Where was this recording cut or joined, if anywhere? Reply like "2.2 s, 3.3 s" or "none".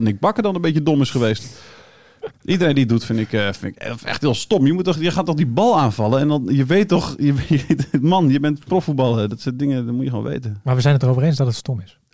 none